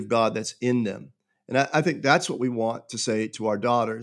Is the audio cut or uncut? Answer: uncut